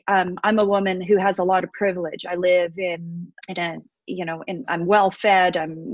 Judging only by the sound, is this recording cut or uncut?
cut